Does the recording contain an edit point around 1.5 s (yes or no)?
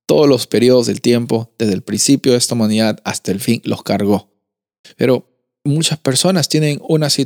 no